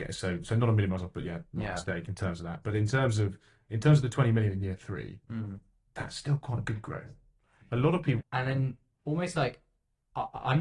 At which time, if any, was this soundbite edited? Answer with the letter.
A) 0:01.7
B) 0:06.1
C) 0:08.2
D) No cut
C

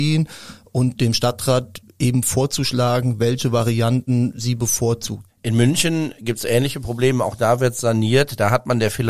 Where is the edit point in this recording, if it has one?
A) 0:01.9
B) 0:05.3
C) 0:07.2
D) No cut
B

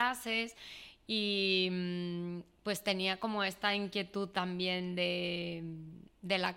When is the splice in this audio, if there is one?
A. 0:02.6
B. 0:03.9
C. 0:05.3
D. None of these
D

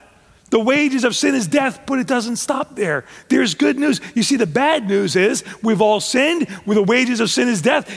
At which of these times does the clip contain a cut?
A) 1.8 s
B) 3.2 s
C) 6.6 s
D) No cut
D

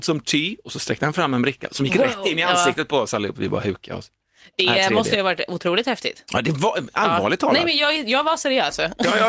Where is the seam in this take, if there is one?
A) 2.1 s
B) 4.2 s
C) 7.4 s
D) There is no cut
D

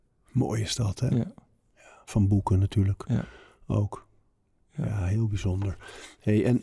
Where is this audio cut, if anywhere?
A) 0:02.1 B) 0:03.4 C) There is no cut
A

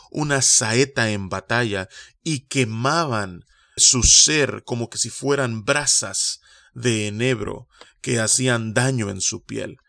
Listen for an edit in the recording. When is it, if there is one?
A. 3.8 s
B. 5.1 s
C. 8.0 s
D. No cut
A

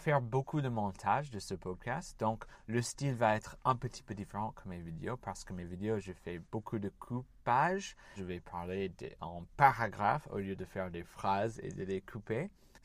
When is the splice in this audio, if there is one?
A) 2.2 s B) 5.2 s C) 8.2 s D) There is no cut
C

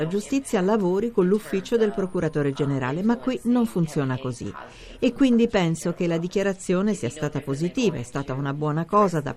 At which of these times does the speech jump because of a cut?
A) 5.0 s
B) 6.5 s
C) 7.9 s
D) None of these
D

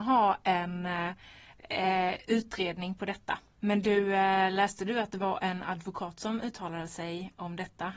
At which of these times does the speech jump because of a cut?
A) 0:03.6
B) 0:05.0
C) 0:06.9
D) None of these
A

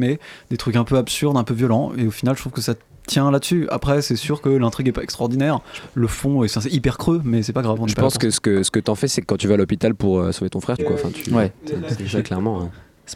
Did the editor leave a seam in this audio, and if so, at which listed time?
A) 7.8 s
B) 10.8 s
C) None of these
B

